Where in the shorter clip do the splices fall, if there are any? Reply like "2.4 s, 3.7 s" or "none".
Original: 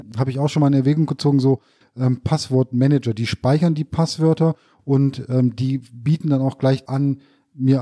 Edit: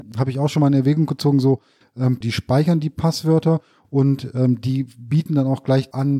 2.2 s